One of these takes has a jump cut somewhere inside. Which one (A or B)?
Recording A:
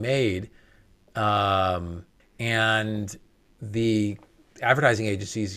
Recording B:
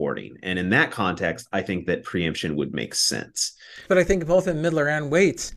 A